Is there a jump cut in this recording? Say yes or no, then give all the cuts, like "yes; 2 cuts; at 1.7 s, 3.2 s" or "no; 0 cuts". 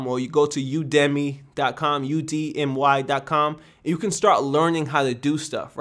no; 0 cuts